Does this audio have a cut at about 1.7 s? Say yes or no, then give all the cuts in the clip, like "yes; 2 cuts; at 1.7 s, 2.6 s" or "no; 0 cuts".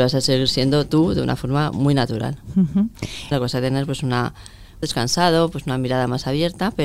no; 2 cuts; at 3.3 s, 4.8 s